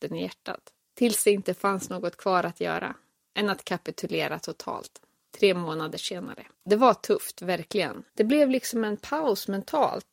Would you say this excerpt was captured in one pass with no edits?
no; 2 cuts; at 6.5 s, 8.1 s

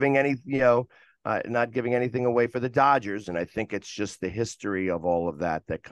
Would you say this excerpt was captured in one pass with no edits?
no; 1 cut; at 3.2 s

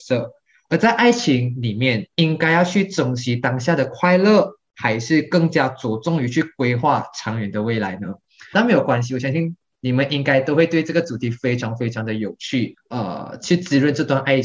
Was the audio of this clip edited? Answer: yes; 2 cuts; at 8.5 s, 12.7 s

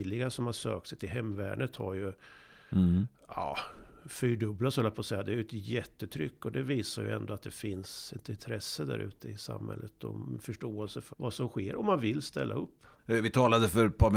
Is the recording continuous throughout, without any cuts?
no; 2 cuts; at 11.1 s, 13.0 s

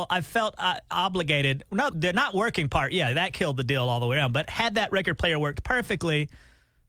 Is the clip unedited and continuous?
no; 1 cut; at 1.9 s

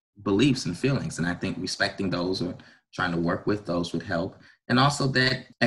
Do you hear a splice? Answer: no; 0 cuts

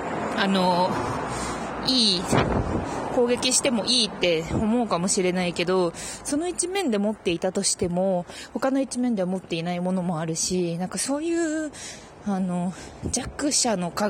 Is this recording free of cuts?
yes; 0 cuts

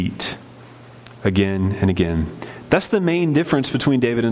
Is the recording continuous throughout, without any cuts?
yes; 0 cuts

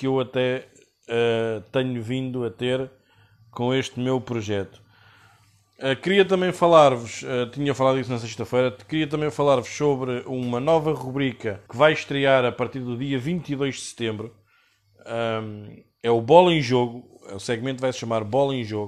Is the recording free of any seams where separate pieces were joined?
no; 1 cut; at 11.7 s

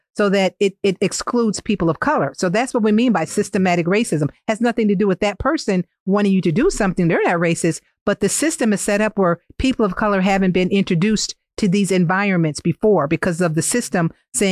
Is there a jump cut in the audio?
no; 0 cuts

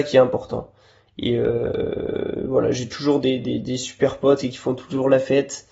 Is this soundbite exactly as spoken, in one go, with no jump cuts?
yes; 0 cuts

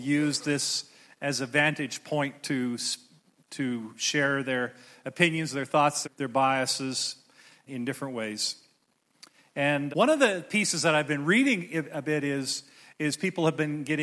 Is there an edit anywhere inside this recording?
yes; 3 cuts; at 6.0 s, 7.7 s, 9.9 s

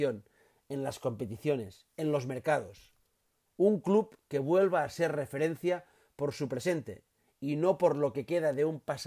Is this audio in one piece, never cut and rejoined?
yes; 0 cuts

